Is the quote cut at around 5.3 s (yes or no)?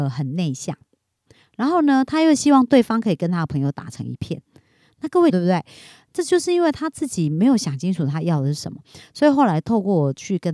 yes